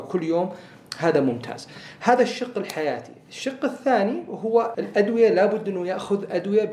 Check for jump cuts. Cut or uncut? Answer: cut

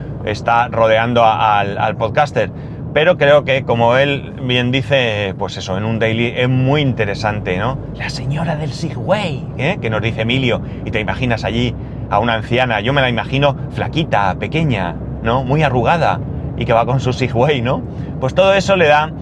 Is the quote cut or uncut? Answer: uncut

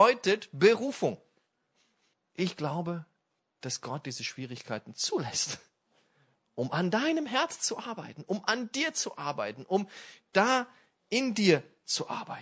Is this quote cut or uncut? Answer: cut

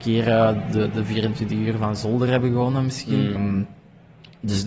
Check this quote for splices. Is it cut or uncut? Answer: cut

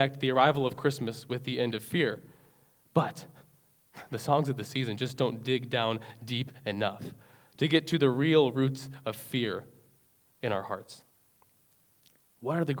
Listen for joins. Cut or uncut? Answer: uncut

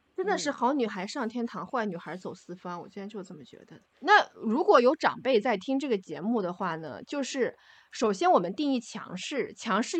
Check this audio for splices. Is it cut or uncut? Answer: cut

